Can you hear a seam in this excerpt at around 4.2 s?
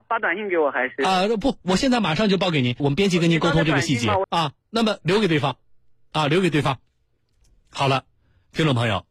yes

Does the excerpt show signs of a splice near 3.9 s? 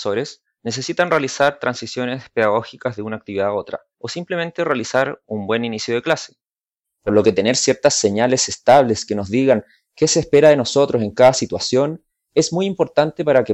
yes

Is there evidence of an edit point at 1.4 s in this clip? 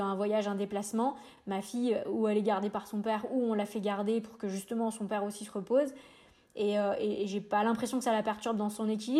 no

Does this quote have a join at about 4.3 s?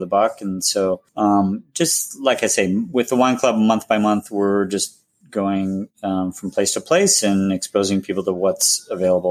no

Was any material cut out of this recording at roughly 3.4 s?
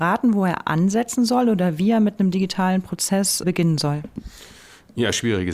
yes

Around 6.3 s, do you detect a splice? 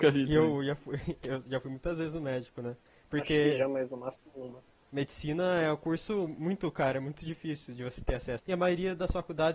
no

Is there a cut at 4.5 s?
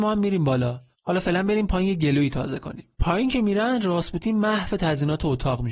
no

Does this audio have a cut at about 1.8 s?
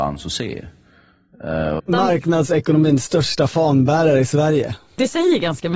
yes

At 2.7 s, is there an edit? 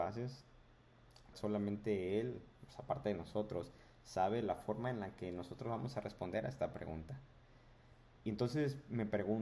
no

